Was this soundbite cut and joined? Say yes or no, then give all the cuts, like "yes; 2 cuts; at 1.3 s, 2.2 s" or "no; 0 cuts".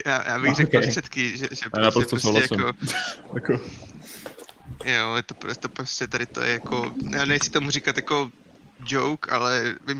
no; 0 cuts